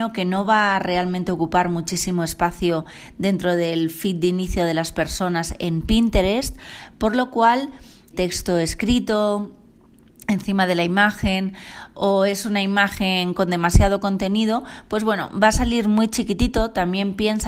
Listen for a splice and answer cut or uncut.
cut